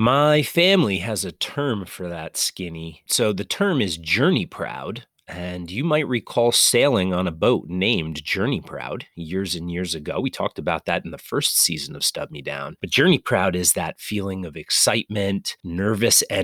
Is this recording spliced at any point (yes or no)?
no